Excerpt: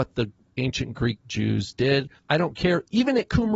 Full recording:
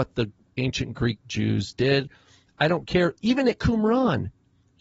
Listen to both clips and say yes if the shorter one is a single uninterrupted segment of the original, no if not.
no